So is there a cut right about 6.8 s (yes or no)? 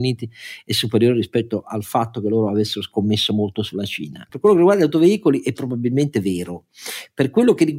no